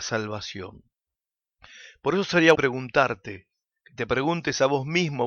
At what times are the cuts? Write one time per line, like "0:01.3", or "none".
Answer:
0:02.5